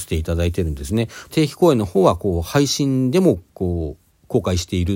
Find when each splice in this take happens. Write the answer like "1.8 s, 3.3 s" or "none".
1.3 s, 3.5 s